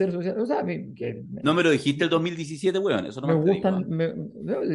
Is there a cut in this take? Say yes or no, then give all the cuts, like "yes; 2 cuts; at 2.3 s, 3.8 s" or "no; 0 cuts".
no; 0 cuts